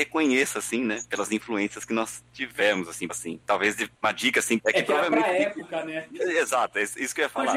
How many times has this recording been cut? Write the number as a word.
two